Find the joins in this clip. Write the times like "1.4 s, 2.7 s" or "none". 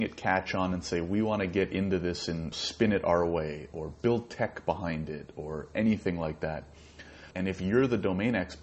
2.5 s, 7.3 s